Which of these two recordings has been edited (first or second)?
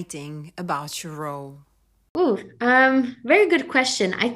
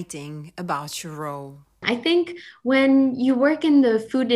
second